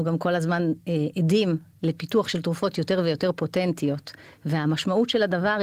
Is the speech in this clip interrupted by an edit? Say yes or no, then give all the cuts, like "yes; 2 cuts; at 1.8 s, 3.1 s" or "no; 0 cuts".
no; 0 cuts